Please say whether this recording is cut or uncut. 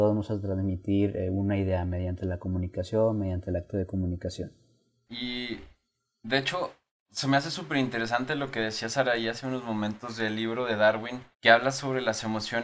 cut